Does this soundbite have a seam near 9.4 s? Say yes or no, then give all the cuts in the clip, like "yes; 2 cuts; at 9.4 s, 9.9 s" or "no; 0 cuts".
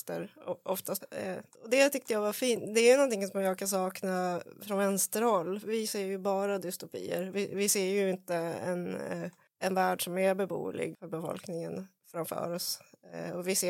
no; 2 cuts; at 1.0 s, 10.9 s